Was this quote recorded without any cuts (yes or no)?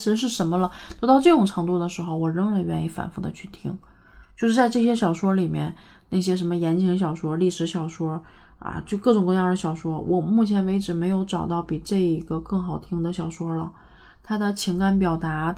yes